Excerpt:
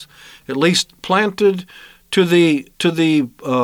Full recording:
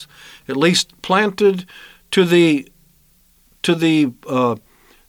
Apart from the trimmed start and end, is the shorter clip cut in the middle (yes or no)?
yes